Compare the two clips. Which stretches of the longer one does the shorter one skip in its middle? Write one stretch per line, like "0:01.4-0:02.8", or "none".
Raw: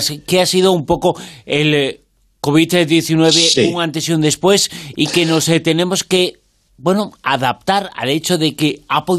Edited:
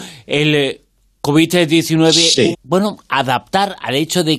0:03.7-0:06.7